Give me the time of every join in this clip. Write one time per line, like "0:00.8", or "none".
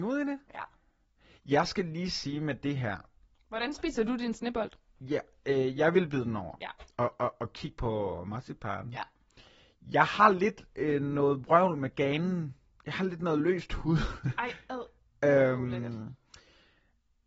none